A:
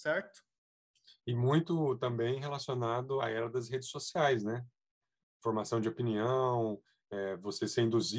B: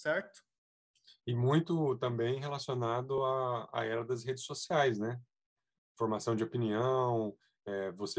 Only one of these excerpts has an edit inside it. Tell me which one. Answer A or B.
A